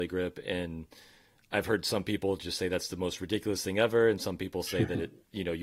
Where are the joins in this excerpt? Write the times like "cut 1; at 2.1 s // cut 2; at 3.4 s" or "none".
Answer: none